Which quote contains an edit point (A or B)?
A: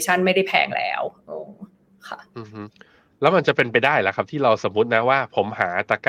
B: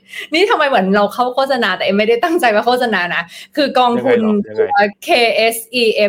B